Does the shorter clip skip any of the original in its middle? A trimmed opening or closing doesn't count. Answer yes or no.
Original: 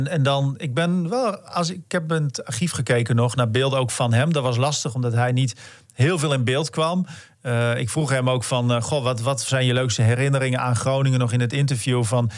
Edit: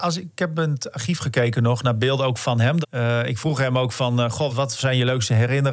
yes